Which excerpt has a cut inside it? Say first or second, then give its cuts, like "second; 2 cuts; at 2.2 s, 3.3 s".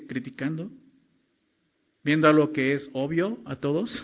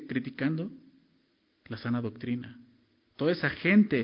second; 1 cut; at 1.6 s